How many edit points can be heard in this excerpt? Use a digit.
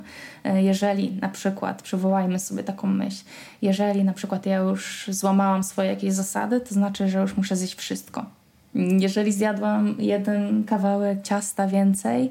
2